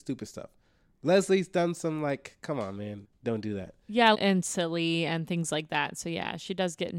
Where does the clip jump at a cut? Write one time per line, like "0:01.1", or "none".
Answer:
0:03.0
0:04.1